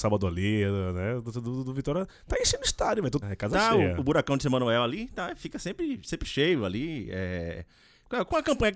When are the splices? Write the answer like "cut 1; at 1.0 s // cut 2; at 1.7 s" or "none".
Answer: cut 1; at 3.2 s